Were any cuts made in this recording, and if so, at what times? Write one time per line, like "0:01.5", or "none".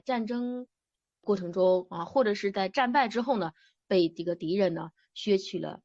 none